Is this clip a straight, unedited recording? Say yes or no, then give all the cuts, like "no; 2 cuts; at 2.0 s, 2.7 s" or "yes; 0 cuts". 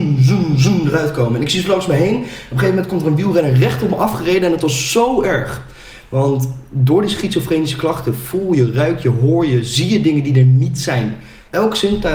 yes; 0 cuts